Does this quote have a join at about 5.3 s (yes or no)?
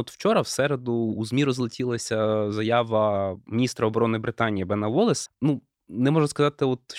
yes